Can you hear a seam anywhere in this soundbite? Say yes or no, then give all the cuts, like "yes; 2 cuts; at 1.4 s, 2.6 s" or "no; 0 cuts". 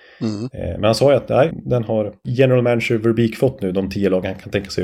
yes; 1 cut; at 1.5 s